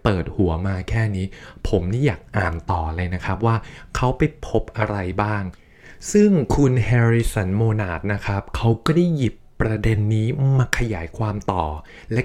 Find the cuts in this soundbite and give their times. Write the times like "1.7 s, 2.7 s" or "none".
none

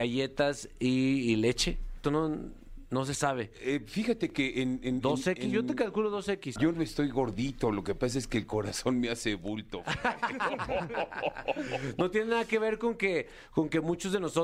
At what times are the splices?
2.0 s, 6.6 s

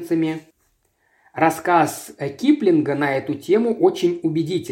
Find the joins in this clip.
none

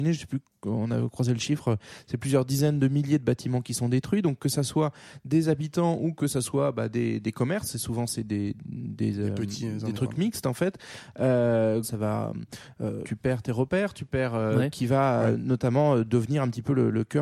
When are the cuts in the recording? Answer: 11.8 s, 13.0 s, 14.7 s

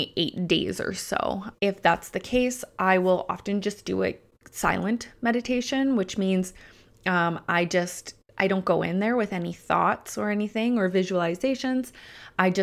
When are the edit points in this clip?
1.5 s

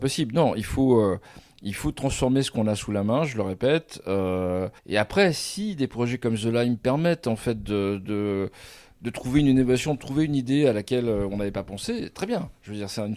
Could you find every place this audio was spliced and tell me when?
4.8 s

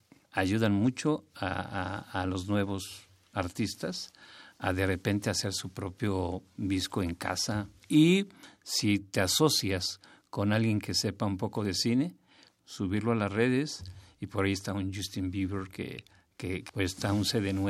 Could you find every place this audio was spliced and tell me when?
7.8 s, 12.6 s, 16.7 s

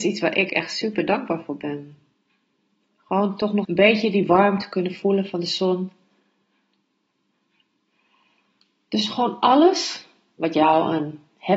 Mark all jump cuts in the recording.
3.6 s

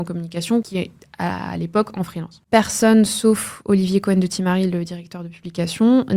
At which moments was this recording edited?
2.4 s

